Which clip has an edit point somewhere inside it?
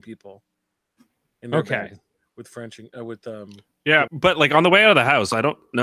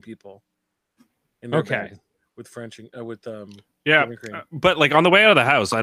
first; 1 cut; at 4.1 s

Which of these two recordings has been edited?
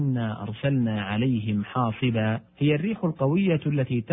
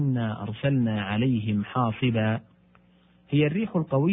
first; 1 cut; at 2.5 s

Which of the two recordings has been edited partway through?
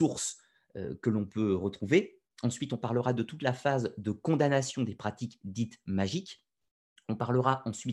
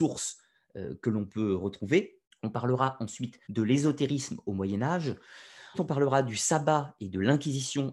second; 3 cuts; at 2.2 s, 3.4 s, 5.7 s

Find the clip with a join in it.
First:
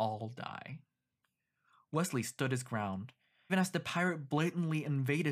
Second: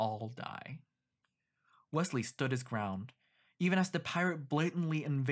first; 1 cut; at 3.5 s

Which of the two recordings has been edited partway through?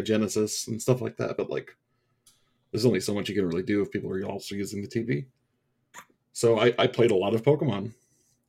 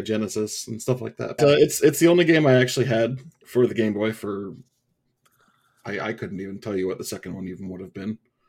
second; 1 cut; at 1.4 s

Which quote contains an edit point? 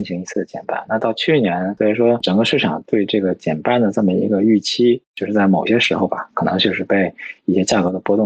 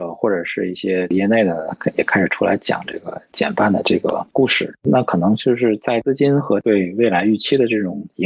first; 1 cut; at 1.8 s

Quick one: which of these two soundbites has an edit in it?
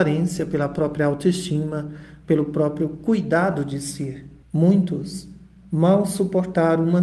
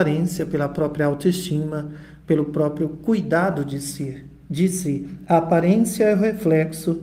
first; 1 cut; at 4.4 s

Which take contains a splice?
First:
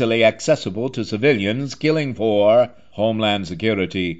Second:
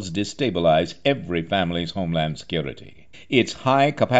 second; 1 cut; at 3.1 s

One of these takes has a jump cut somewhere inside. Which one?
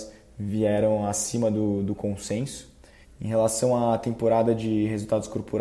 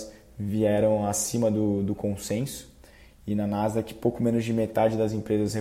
first; 1 cut; at 3.0 s

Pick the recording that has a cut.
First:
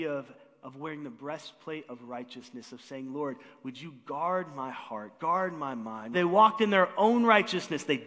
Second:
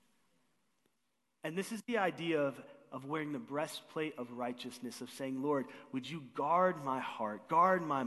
first; 1 cut; at 6.1 s

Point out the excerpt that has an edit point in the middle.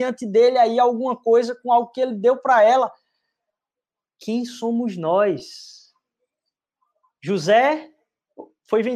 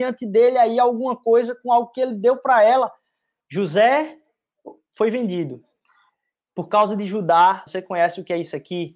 second; 2 cuts; at 3.4 s, 7.7 s

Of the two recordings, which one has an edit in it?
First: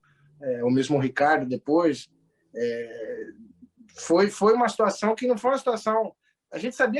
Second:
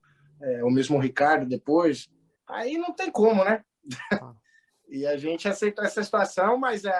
second; 1 cut; at 2.4 s

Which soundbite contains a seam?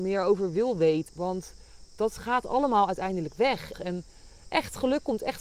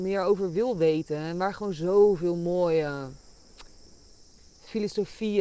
first; 2 cuts; at 1.1 s, 3.7 s

